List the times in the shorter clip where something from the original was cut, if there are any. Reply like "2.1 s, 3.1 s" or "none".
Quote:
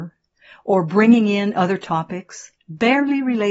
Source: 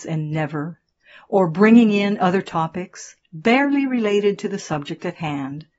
none